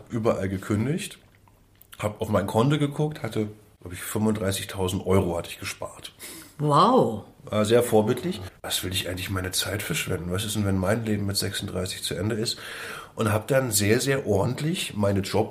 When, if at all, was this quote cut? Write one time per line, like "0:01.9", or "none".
0:08.5